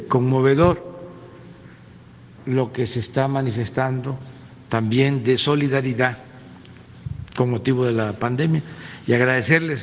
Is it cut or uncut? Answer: uncut